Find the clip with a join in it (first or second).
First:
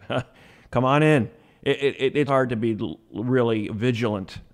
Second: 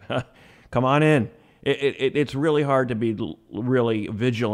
first